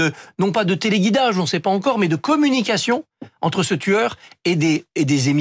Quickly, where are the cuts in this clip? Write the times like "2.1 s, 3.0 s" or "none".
none